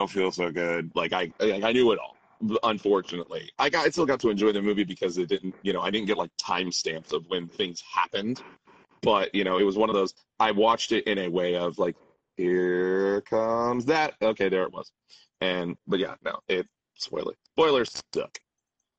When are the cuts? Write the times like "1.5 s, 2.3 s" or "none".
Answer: none